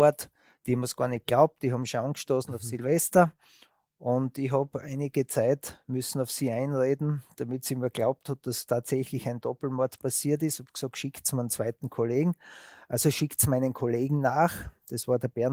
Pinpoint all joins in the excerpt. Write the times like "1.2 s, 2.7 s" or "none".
none